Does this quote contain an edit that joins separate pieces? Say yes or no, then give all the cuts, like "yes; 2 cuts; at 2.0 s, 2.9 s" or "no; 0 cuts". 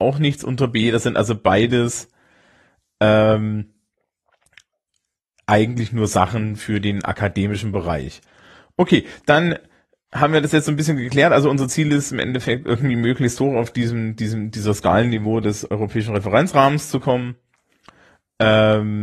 no; 0 cuts